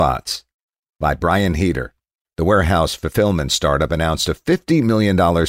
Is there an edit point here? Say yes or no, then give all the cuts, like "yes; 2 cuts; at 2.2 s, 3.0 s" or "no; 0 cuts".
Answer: yes; 1 cut; at 2.2 s